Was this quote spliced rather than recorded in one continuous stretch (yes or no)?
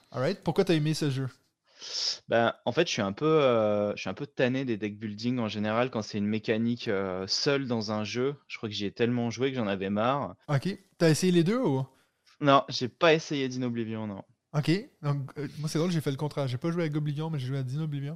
yes